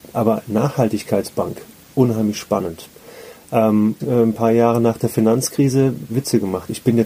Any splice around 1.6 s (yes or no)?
no